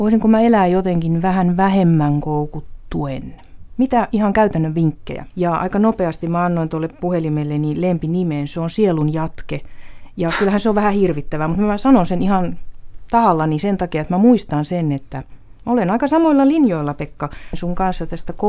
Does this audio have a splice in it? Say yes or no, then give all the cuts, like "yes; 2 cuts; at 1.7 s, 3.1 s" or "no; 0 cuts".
yes; 1 cut; at 5.3 s